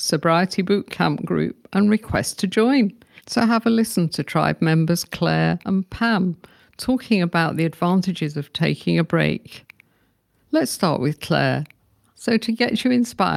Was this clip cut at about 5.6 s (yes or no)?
yes